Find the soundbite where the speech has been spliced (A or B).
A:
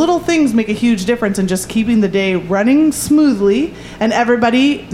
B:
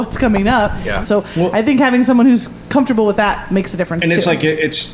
B